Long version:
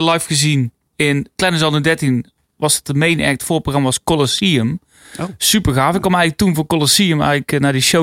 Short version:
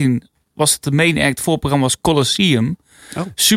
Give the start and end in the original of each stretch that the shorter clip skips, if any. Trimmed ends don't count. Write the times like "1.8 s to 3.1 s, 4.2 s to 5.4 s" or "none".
none